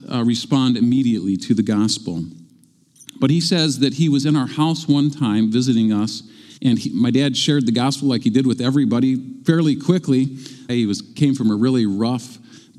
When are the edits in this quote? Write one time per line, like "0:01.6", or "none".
0:06.6
0:10.7